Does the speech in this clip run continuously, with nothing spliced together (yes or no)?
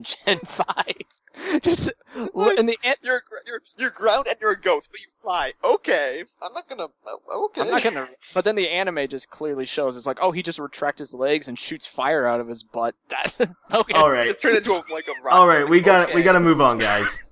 yes